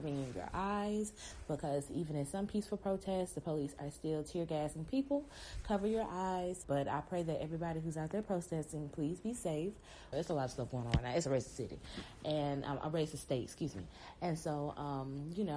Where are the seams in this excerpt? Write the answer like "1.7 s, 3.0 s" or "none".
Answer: 6.6 s, 10.1 s